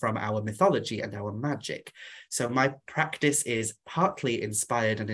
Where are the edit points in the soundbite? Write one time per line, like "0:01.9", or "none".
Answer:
none